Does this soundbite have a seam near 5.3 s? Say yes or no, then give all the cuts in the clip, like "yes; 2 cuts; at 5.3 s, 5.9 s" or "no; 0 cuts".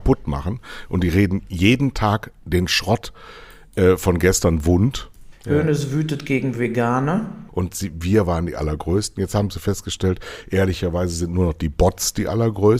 yes; 2 cuts; at 5.3 s, 7.5 s